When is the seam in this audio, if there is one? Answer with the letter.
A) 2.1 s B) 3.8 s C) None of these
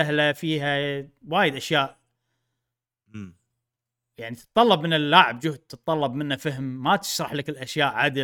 C